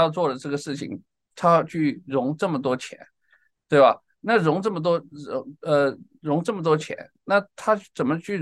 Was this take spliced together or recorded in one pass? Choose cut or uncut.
uncut